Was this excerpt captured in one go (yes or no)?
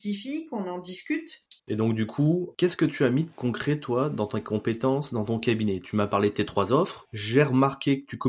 no